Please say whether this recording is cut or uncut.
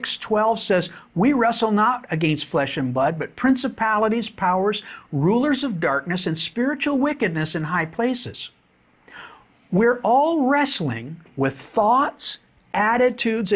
uncut